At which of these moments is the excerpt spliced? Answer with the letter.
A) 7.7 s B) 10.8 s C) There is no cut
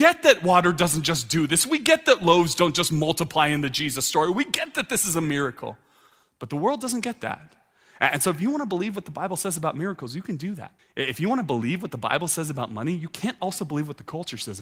B